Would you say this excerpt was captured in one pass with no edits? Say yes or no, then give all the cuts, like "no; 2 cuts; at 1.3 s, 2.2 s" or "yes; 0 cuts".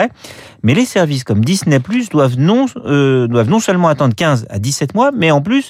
yes; 0 cuts